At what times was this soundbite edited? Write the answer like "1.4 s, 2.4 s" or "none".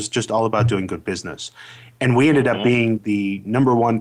3.0 s